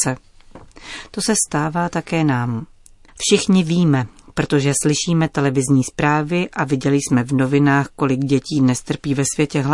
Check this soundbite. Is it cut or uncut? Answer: uncut